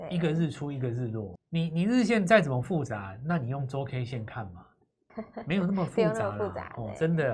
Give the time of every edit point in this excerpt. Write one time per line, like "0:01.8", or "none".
0:01.4
0:05.1